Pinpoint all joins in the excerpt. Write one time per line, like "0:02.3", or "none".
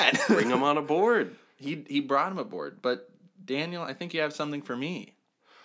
none